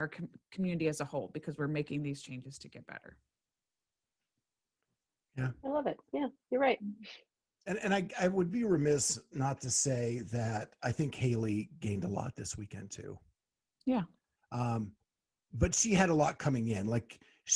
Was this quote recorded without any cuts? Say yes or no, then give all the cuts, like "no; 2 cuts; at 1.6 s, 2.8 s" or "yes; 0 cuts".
no; 1 cut; at 11.8 s